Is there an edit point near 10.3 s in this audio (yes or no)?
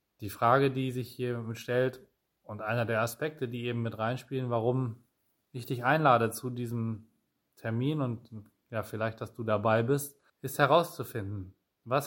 yes